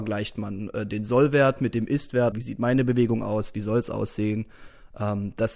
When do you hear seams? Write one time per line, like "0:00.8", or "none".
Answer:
0:02.3